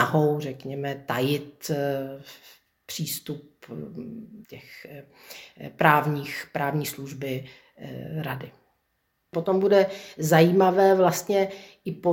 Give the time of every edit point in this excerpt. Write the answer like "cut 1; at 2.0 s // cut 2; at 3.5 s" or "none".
cut 1; at 4.4 s